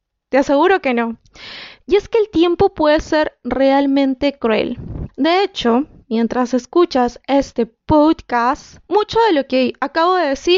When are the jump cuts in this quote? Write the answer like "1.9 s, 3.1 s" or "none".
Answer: 5.1 s, 8.8 s